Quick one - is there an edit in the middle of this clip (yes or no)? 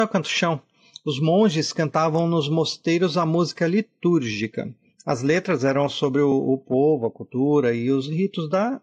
no